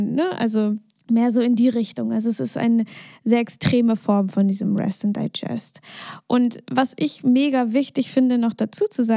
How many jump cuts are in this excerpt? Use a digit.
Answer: 0